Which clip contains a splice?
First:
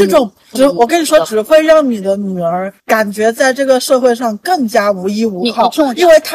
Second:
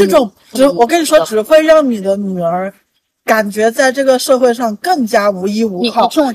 first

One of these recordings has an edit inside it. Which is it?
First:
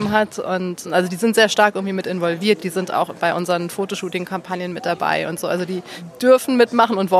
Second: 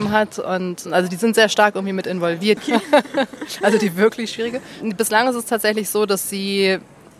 second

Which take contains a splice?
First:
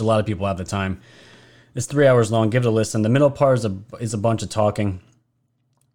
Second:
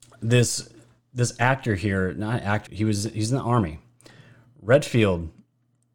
second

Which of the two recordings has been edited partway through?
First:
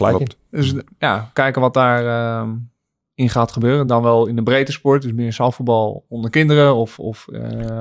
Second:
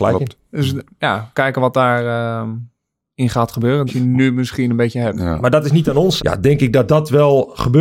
second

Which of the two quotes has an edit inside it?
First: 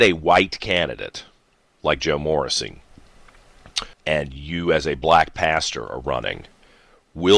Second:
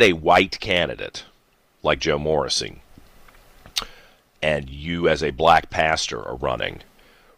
first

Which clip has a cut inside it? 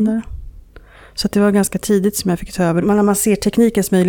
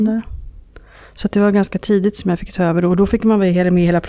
first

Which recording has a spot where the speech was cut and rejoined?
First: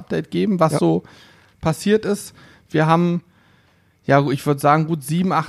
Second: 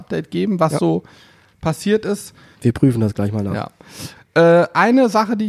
second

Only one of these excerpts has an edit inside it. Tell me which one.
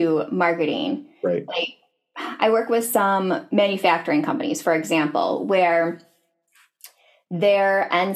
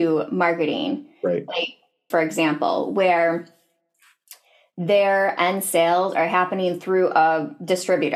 second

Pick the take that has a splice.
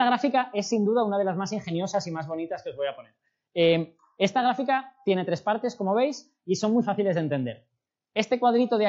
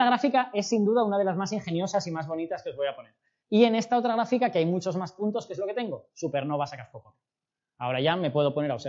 second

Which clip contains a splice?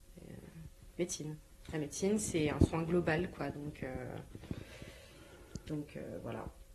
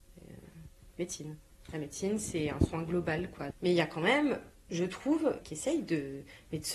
second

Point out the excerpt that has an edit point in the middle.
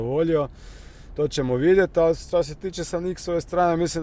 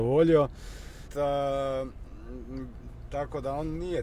second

